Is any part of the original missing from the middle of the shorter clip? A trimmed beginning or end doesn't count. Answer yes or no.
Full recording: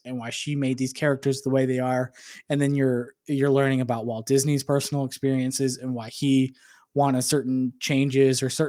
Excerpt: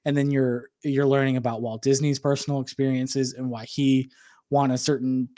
no